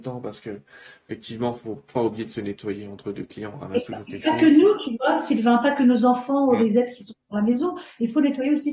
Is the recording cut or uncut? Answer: uncut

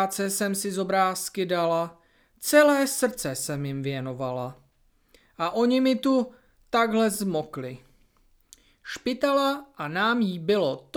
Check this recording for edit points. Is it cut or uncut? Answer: uncut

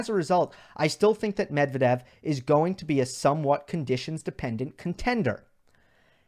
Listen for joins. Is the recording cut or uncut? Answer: uncut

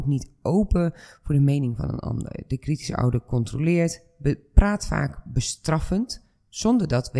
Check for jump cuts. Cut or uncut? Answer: uncut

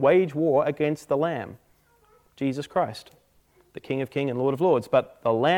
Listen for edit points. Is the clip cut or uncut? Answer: uncut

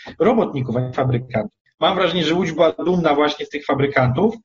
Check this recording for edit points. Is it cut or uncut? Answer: cut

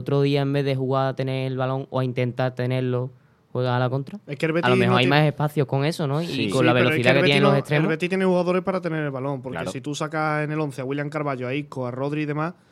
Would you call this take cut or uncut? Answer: uncut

